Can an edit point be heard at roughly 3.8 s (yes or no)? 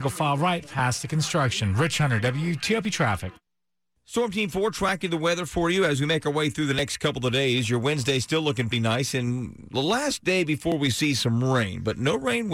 no